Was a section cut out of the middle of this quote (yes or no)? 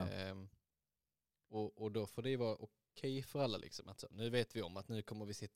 no